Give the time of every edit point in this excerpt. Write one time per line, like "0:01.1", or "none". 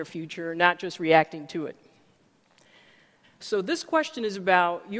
0:03.2

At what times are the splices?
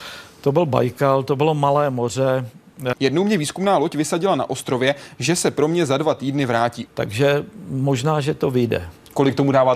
0:02.9
0:06.9

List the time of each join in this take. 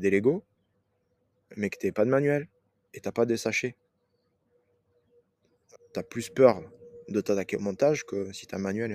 0:05.8

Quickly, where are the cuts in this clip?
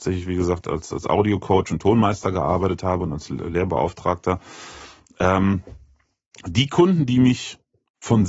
none

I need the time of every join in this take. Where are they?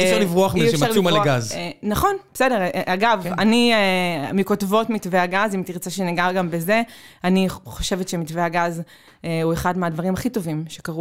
none

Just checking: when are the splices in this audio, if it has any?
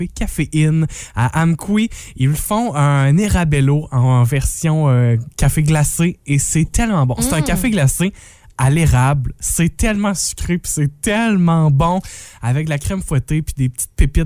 none

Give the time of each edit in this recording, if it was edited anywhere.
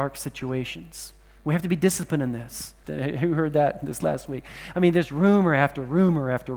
0:02.8

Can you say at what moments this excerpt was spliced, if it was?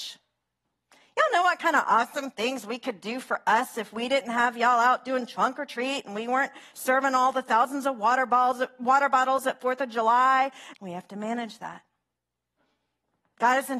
0:10.7

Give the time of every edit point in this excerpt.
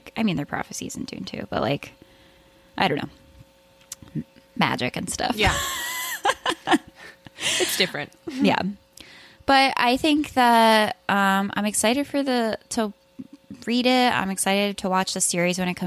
none

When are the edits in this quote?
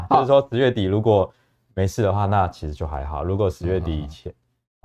none

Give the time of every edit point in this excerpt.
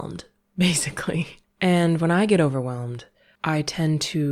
0:01.4

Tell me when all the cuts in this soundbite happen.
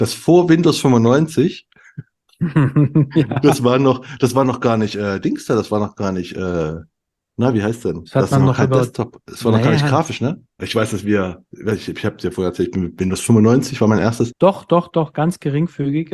0:10.6
0:14.3

